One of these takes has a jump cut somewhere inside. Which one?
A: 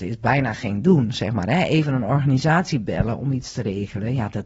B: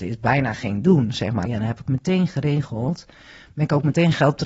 B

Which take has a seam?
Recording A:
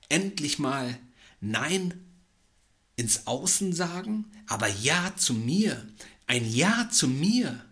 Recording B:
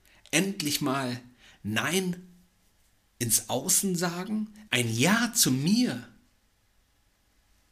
B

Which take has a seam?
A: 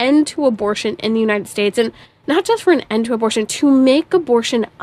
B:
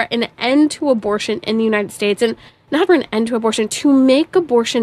B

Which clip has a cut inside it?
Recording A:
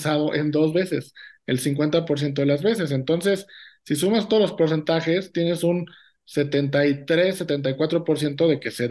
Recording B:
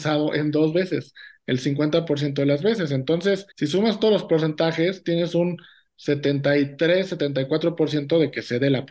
B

